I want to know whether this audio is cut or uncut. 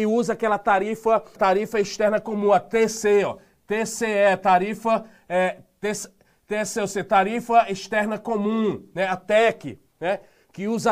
cut